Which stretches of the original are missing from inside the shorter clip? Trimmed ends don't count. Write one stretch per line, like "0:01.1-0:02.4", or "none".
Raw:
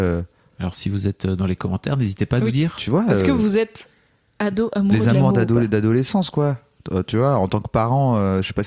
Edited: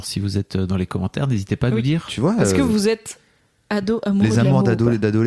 none